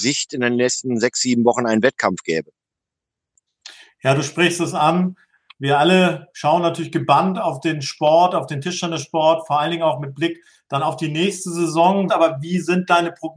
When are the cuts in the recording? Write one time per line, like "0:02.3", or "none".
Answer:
0:12.1